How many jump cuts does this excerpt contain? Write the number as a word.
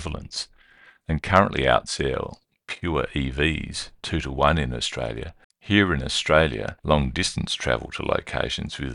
two